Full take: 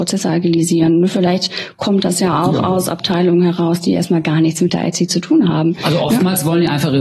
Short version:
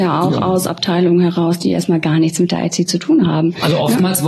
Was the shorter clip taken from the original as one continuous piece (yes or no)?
yes